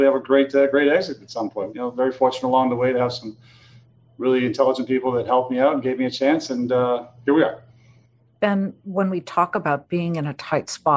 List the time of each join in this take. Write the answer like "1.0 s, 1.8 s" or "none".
1.7 s